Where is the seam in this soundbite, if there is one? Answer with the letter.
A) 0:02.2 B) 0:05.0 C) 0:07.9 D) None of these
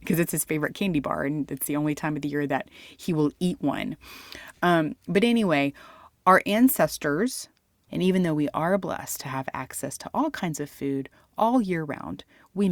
C